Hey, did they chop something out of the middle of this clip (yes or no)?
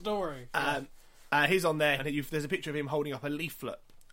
yes